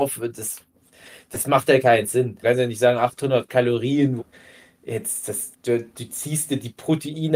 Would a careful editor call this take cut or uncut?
cut